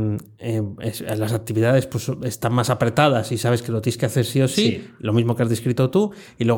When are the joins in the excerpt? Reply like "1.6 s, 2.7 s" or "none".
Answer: none